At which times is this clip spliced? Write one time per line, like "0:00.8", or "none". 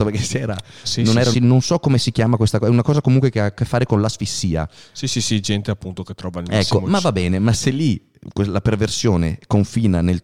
0:01.3